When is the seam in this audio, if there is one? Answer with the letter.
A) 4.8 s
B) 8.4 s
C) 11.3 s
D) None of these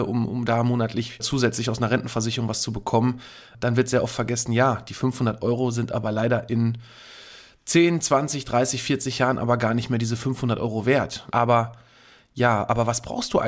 C